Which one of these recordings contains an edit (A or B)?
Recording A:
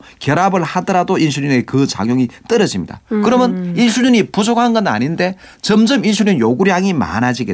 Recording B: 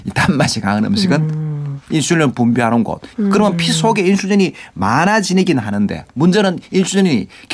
B